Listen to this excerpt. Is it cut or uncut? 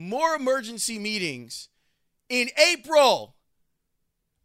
uncut